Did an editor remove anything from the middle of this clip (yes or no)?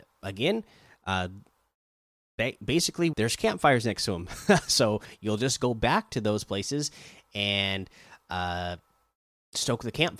yes